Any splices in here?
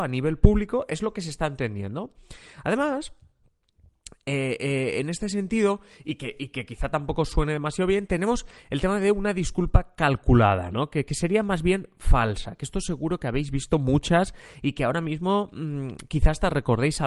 no; 0 cuts

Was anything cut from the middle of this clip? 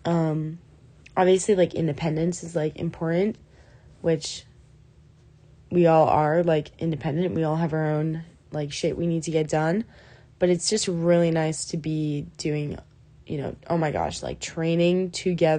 no; 0 cuts

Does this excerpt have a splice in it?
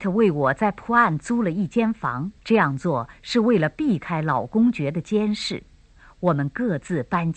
yes; 1 cut; at 2.4 s

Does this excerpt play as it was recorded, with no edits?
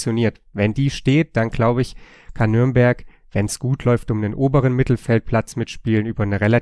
yes; 0 cuts

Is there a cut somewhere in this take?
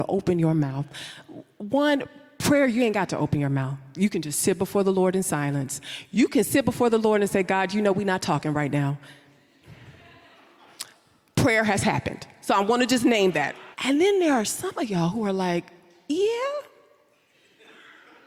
yes; 1 cut; at 13.7 s

